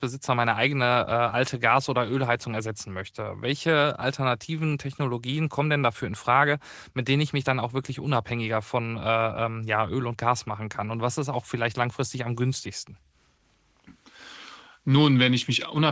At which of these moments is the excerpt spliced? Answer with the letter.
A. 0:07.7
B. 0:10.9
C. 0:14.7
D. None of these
D